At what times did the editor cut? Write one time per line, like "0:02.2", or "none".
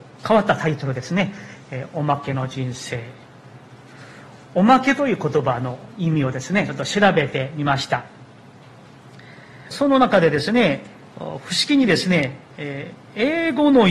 0:09.7
0:11.1

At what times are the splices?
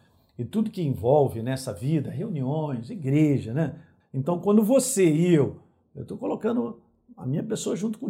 0:04.0

